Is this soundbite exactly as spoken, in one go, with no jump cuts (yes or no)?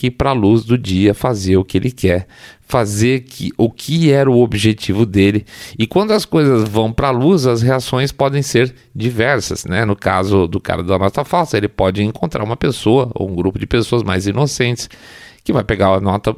yes